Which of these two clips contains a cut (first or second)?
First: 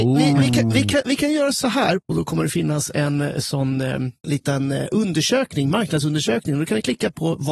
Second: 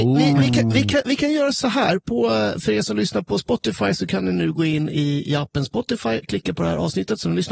first